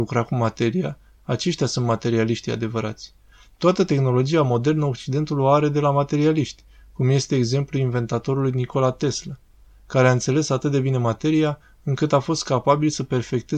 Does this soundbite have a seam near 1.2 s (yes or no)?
yes